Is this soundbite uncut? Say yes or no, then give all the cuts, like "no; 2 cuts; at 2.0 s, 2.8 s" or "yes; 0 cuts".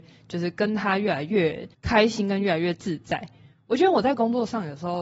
no; 1 cut; at 1.7 s